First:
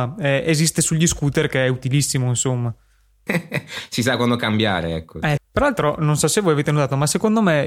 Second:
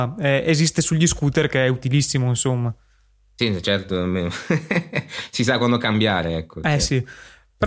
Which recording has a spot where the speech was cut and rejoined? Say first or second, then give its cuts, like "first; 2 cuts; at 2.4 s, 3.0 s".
first; 2 cuts; at 3.3 s, 5.4 s